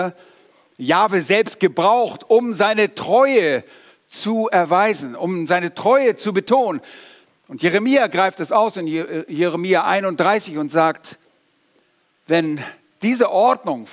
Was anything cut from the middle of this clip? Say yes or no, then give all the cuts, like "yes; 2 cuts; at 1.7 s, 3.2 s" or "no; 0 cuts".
no; 0 cuts